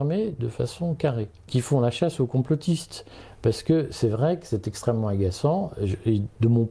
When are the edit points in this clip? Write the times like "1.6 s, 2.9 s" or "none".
1.5 s